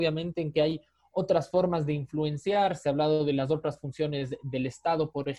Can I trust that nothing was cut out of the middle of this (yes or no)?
yes